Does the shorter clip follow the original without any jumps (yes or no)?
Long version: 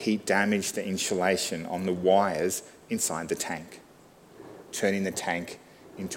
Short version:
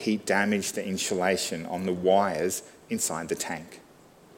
yes